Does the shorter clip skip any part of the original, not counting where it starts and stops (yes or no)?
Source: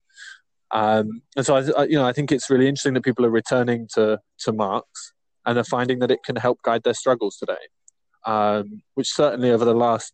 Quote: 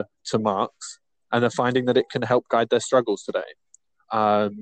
no